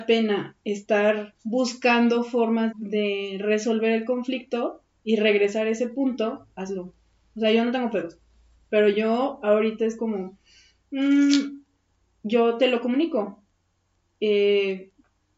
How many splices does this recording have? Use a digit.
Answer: 1